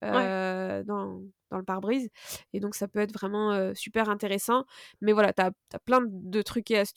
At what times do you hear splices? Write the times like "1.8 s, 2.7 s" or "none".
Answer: none

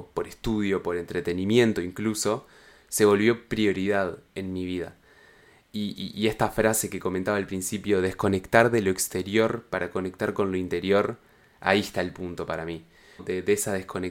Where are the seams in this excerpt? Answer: 13.2 s

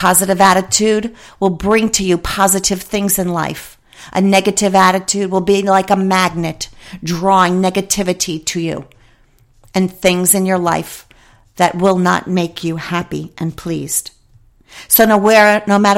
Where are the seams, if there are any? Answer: none

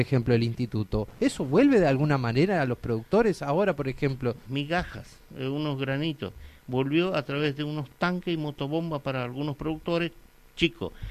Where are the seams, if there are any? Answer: 4.4 s

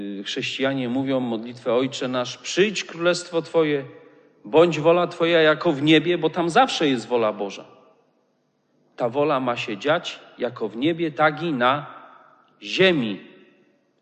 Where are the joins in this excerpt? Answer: none

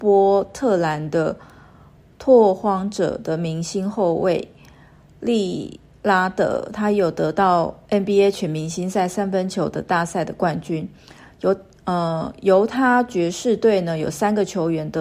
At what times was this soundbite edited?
none

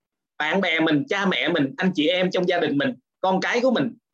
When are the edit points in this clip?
none

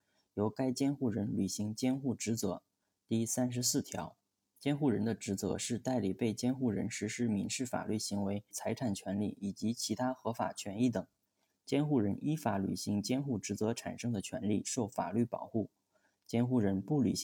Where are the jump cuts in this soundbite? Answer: 8.5 s

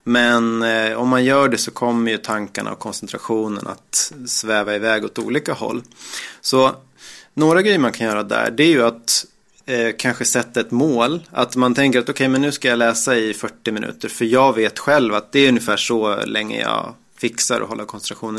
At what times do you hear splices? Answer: none

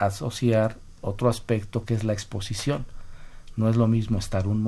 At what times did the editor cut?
none

